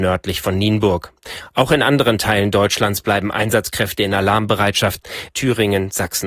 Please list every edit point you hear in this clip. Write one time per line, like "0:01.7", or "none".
0:05.3